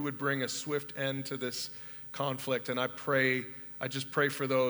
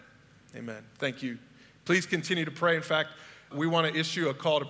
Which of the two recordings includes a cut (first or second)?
second